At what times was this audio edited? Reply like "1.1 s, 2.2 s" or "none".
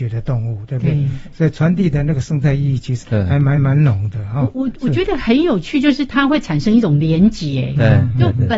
3.5 s